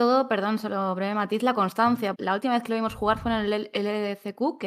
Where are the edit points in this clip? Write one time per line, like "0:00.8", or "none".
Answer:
0:02.1

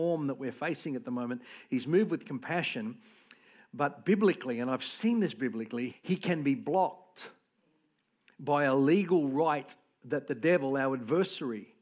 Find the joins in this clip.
0:05.9

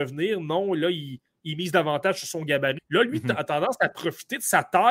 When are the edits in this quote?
0:02.8

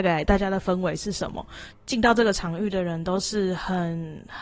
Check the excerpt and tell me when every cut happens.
0:01.7

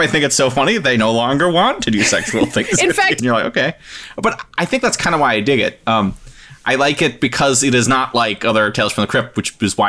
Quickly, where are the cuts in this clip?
0:03.2

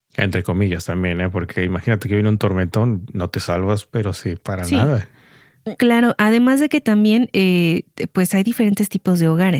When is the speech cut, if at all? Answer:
0:05.8

